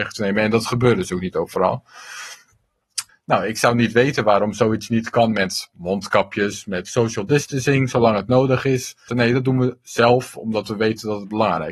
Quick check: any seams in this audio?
yes; 2 cuts; at 3.1 s, 9.1 s

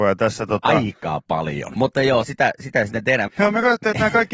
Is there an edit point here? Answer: yes; 2 cuts; at 1.7 s, 3.3 s

